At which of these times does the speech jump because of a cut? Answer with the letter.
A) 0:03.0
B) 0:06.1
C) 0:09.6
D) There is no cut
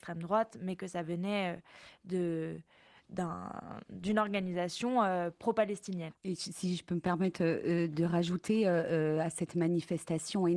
B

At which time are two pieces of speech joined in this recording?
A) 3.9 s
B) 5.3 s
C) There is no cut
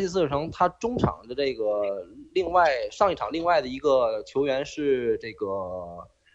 C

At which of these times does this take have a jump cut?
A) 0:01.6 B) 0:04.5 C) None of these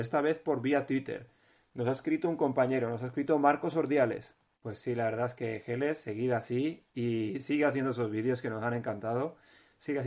B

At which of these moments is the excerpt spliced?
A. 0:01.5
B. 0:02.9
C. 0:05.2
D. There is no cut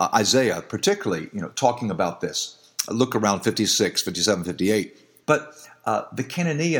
C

